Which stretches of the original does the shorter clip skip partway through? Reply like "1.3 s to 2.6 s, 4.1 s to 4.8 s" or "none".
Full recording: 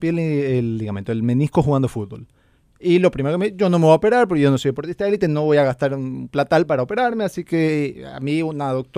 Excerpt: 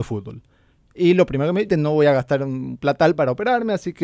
3.5 s to 5.2 s